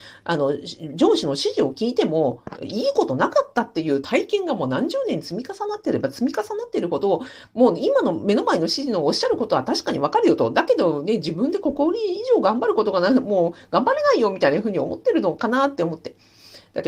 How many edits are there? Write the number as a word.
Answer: zero